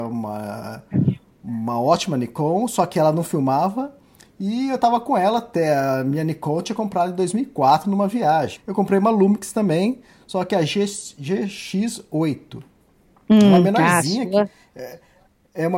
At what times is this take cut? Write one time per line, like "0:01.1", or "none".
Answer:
0:08.6